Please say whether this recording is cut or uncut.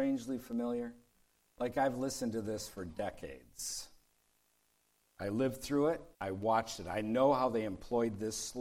cut